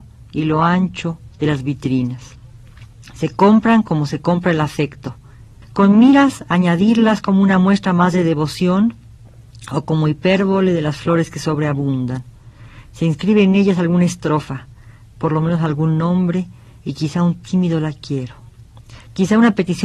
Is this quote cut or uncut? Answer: cut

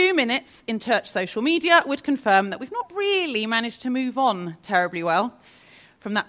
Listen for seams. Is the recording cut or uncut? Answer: uncut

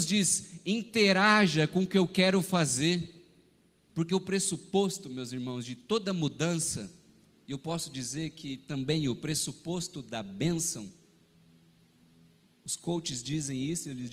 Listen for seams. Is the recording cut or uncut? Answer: cut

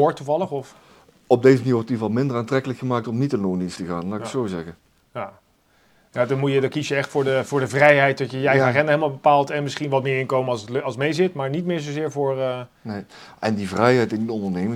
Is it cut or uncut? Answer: uncut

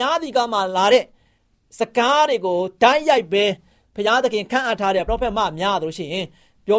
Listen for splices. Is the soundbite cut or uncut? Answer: cut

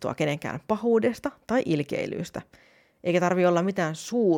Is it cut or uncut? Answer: uncut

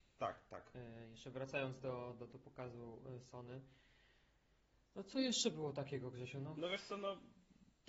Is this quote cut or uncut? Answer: uncut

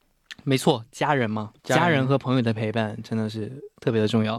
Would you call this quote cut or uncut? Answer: cut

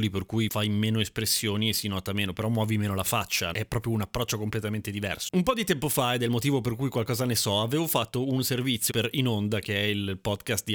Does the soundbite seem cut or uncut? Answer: cut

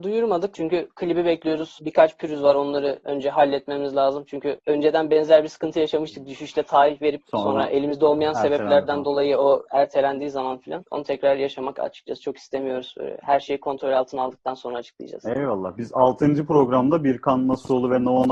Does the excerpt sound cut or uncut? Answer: uncut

